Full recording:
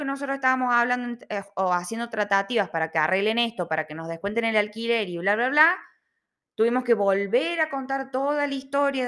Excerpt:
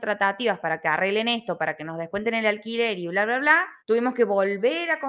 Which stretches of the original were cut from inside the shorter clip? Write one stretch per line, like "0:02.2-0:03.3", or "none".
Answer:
0:05.9-0:06.5